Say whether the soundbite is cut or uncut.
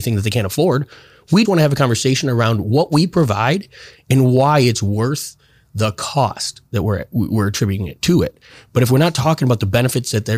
cut